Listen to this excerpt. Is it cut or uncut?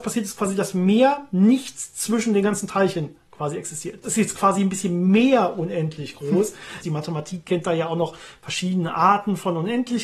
cut